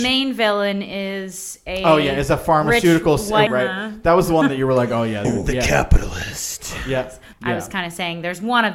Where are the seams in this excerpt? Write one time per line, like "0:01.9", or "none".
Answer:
0:03.5
0:05.2
0:07.3